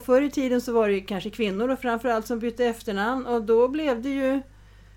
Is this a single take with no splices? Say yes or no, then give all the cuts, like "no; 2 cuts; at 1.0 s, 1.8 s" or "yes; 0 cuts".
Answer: yes; 0 cuts